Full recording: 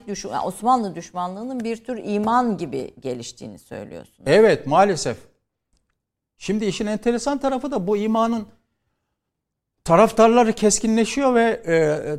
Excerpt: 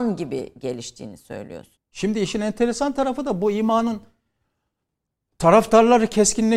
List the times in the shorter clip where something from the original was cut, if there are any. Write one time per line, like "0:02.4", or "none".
0:01.8